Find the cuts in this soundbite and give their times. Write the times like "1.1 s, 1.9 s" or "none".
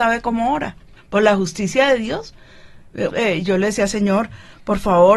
1.0 s, 3.1 s